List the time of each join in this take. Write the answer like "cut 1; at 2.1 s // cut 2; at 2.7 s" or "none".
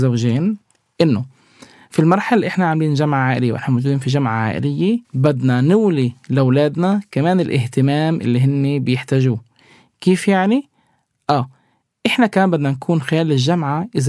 cut 1; at 5.0 s